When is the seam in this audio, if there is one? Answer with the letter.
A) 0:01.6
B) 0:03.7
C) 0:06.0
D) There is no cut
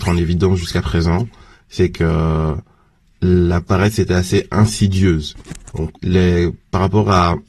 C